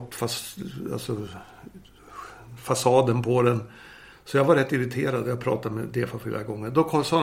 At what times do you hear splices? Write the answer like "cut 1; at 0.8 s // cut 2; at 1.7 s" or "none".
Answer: cut 1; at 4.1 s